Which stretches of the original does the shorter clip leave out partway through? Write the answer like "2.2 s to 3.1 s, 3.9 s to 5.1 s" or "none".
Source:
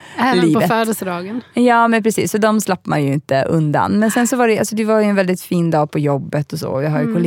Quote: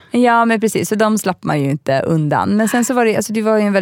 none